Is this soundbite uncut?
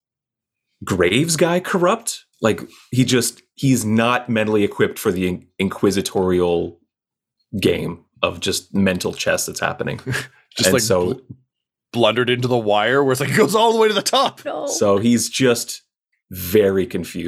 no; 2 cuts; at 2.3 s, 14.4 s

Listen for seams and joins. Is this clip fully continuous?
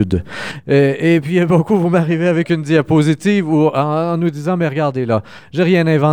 yes; 0 cuts

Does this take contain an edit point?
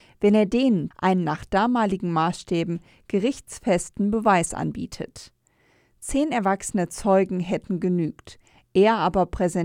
yes; 1 cut; at 0.9 s

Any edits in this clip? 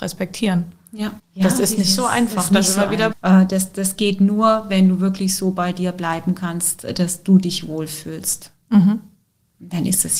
yes; 2 cuts; at 1.2 s, 3.1 s

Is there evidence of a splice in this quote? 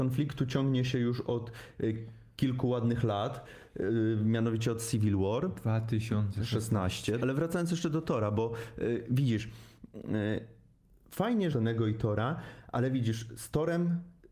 yes; 2 cuts; at 7.2 s, 11.5 s

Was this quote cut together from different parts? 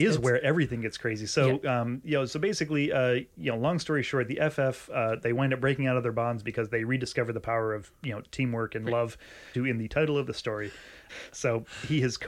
yes; 2 cuts; at 9.5 s, 11.1 s

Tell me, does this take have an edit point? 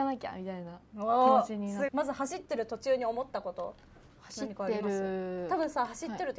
yes; 1 cut; at 1.9 s

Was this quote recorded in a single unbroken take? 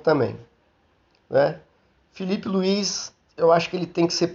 yes; 0 cuts

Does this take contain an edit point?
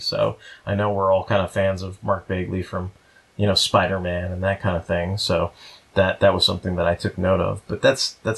no; 0 cuts

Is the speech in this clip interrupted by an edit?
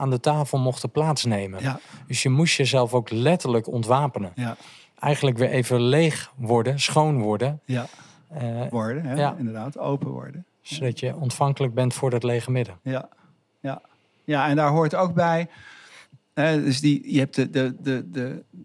yes; 1 cut; at 8.7 s

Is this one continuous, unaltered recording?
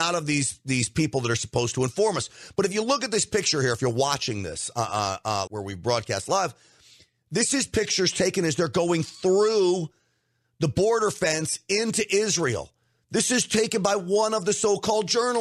no; 1 cut; at 5.5 s

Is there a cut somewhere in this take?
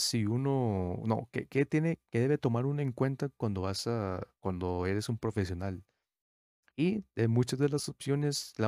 no; 0 cuts

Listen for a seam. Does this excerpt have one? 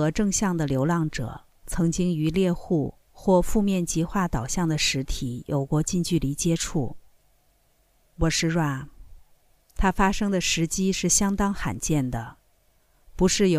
yes; 1 cut; at 8.1 s

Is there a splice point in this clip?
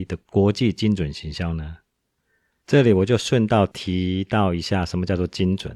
yes; 1 cut; at 2.6 s

